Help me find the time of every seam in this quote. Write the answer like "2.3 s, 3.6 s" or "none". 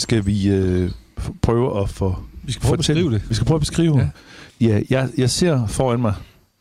4.5 s